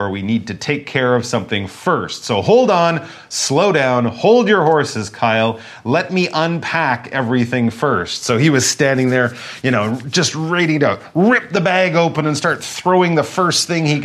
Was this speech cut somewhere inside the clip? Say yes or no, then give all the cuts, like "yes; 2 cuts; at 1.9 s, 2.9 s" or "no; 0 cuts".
no; 0 cuts